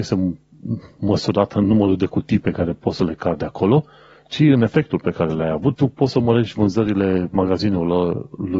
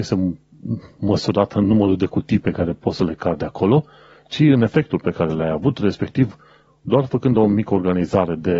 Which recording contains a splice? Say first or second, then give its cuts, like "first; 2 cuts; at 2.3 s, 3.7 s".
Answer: first; 1 cut; at 5.7 s